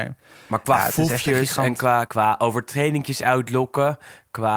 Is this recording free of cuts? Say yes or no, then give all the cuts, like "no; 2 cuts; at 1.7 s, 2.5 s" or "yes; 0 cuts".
no; 1 cut; at 2.1 s